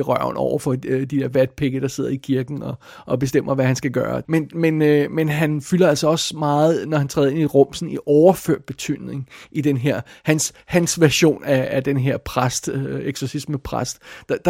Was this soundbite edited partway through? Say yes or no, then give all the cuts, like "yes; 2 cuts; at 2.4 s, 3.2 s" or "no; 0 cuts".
yes; 1 cut; at 4.2 s